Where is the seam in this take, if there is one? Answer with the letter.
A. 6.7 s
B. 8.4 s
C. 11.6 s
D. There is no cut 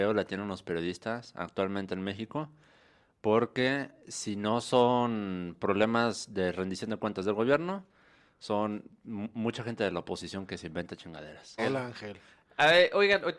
C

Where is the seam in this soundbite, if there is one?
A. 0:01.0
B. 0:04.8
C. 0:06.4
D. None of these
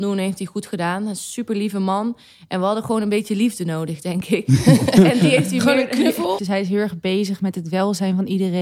C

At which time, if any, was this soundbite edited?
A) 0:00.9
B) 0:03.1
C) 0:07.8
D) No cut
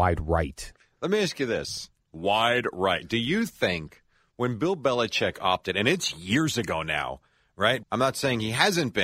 C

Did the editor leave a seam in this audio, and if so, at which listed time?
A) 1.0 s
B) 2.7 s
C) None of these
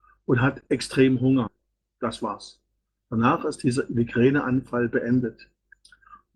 C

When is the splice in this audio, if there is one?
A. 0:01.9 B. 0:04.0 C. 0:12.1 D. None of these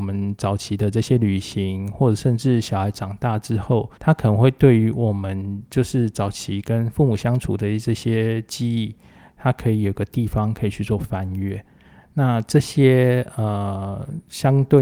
B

